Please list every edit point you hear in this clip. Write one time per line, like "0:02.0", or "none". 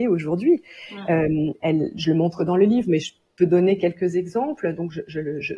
none